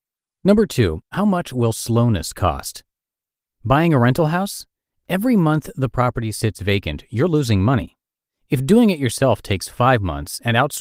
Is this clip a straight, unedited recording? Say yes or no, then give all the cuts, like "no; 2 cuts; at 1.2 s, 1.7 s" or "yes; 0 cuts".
yes; 0 cuts